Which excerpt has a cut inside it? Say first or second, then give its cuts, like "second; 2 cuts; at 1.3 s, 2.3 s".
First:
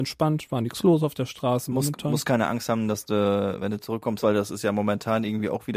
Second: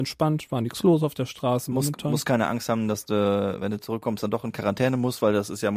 first; 1 cut; at 4.2 s